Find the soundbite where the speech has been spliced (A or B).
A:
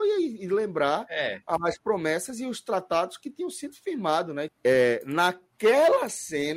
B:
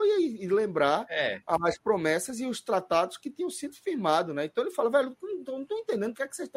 A